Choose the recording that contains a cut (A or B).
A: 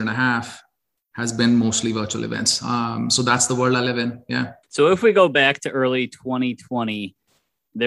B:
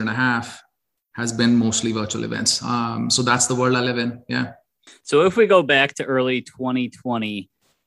A